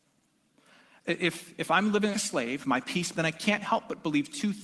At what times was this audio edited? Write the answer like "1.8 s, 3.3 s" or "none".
2.1 s, 3.1 s